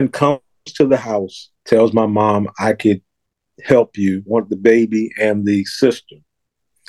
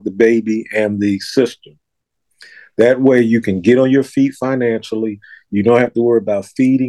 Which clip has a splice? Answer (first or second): first